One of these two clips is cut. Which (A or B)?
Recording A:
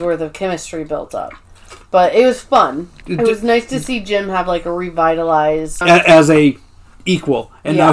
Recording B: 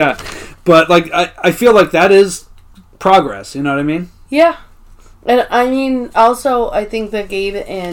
A